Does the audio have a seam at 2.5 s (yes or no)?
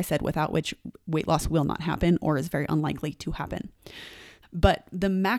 no